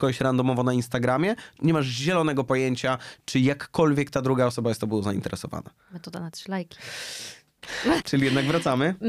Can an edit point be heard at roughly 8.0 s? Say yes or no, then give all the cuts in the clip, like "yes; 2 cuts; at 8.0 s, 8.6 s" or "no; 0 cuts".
yes; 2 cuts; at 1.6 s, 8.0 s